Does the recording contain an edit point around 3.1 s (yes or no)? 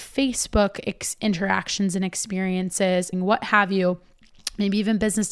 yes